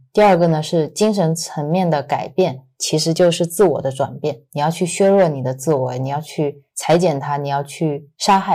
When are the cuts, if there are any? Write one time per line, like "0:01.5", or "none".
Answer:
none